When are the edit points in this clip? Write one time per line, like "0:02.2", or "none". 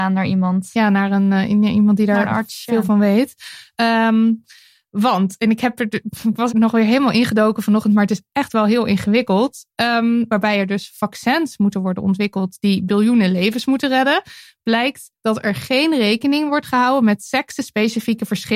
0:06.5
0:10.3